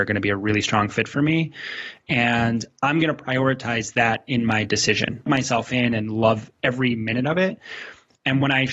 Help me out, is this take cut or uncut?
cut